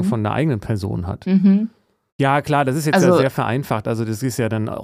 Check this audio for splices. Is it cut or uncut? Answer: cut